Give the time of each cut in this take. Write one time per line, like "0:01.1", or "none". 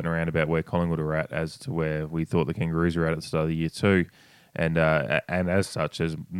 none